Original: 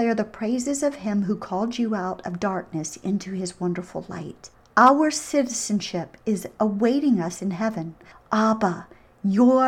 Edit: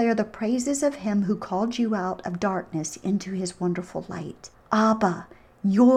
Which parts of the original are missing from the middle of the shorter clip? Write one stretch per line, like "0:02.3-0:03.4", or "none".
0:04.6-0:08.2